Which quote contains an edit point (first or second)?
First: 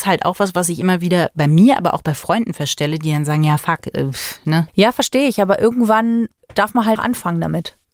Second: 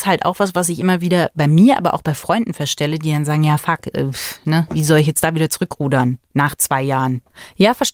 first